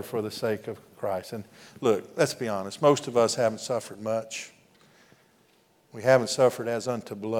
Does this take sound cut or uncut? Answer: uncut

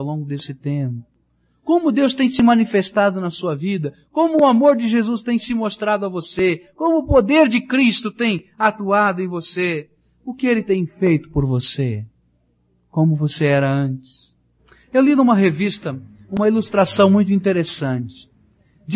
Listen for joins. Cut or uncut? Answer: uncut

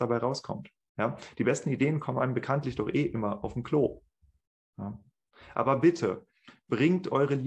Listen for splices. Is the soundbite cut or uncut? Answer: uncut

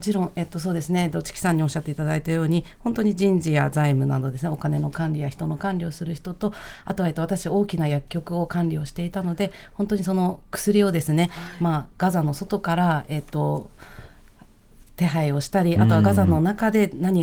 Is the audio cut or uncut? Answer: uncut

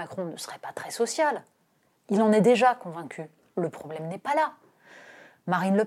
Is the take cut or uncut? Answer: uncut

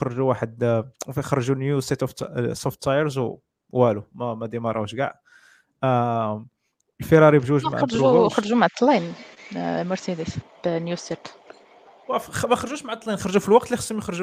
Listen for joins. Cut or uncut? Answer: uncut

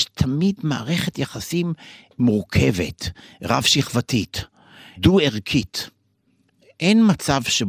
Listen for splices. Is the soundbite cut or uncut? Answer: uncut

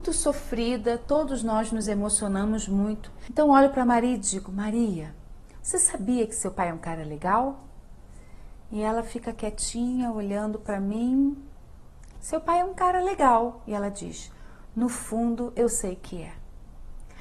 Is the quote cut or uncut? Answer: uncut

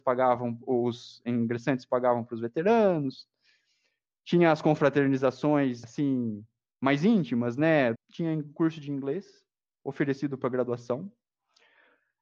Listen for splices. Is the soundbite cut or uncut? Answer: cut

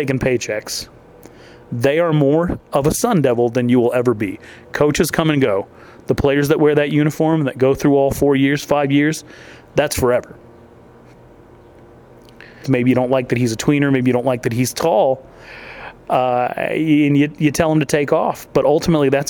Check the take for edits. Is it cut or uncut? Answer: cut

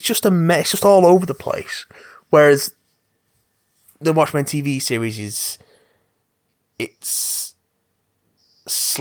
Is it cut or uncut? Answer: uncut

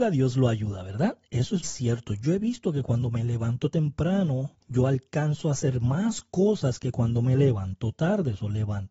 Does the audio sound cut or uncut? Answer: cut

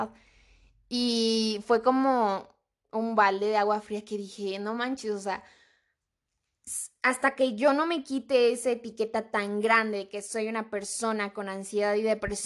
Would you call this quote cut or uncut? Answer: uncut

